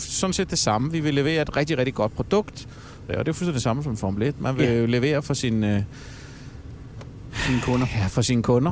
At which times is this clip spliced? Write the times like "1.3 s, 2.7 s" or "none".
3.1 s